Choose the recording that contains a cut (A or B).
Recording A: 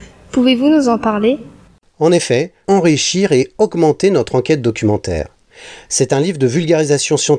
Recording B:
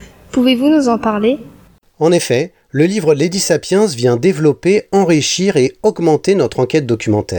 A